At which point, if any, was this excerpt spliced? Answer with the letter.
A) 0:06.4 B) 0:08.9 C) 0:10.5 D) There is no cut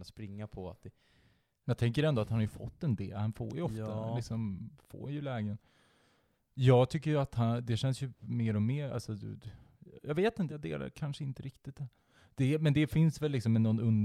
C